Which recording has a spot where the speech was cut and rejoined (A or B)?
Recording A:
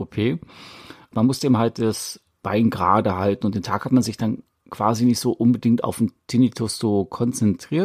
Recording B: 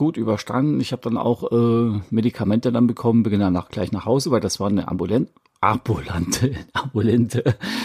A